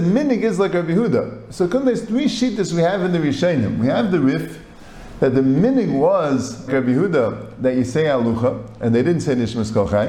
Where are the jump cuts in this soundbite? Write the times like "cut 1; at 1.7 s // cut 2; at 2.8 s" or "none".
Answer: cut 1; at 6.7 s